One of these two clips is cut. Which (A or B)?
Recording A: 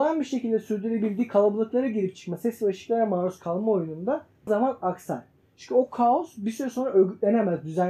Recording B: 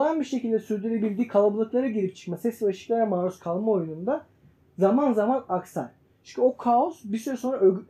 A